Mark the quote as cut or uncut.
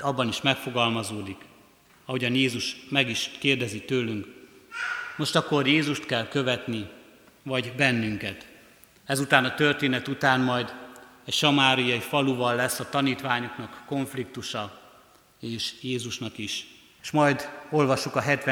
cut